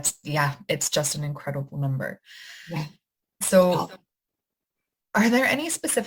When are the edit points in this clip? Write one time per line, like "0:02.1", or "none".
none